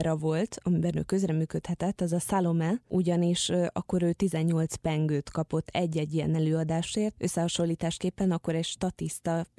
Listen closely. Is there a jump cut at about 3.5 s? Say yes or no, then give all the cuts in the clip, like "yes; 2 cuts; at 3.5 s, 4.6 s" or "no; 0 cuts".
no; 0 cuts